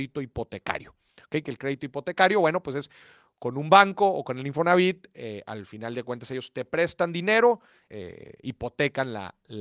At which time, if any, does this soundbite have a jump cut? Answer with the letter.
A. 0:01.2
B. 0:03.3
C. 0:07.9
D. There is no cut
C